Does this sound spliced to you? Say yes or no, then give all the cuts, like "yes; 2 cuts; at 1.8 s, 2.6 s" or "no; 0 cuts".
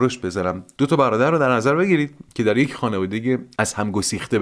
no; 0 cuts